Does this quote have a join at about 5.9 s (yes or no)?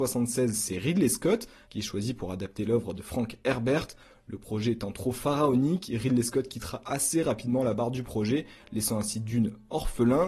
no